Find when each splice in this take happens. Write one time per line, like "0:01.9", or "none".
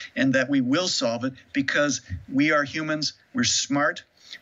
none